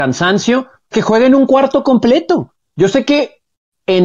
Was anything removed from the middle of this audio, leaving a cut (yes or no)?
yes